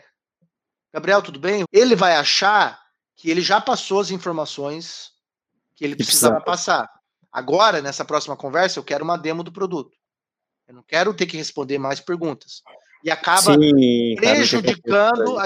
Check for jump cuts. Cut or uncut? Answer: cut